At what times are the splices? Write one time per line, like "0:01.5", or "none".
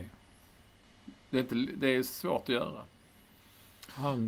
none